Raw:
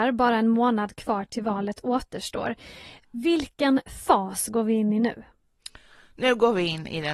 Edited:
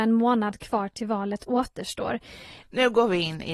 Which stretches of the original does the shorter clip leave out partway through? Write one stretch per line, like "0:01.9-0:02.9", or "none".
0:03.0-0:06.1